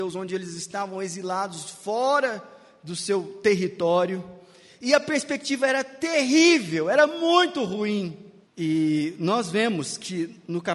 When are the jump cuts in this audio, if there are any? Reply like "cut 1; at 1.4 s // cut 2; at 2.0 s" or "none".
cut 1; at 8.4 s